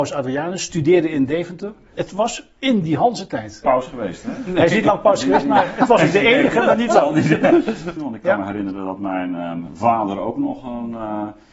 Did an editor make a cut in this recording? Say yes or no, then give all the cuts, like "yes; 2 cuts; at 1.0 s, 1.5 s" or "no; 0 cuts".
yes; 3 cuts; at 1.9 s, 3.6 s, 8.0 s